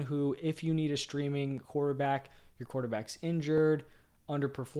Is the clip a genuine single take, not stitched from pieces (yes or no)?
yes